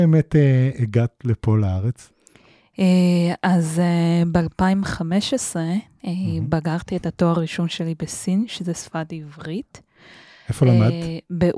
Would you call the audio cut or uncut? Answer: uncut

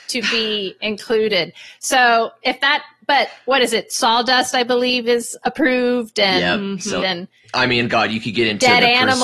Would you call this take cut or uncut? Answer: cut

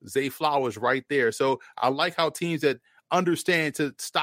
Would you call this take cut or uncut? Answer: uncut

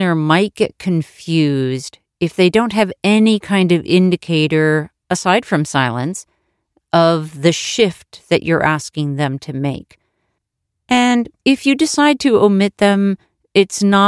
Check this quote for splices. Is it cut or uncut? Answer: uncut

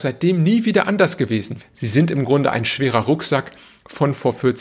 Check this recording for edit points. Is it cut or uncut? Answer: cut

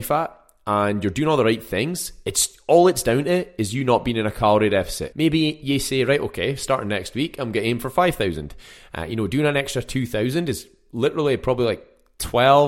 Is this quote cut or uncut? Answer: cut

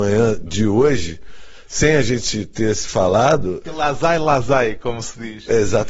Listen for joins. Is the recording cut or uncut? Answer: uncut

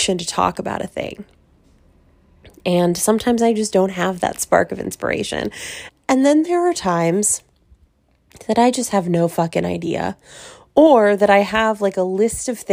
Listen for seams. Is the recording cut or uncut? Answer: cut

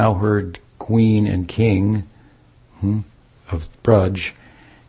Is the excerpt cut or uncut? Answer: uncut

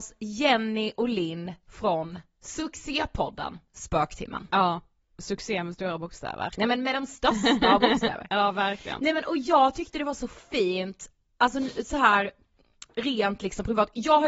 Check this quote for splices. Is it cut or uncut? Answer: uncut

